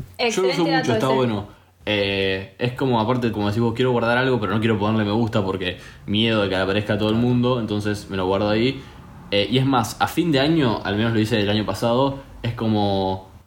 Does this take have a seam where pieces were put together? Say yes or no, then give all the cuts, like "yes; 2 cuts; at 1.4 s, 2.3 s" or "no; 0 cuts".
yes; 1 cut; at 3.3 s